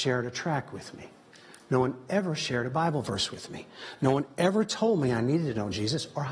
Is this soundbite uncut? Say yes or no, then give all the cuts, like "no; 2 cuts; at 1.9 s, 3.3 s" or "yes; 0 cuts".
yes; 0 cuts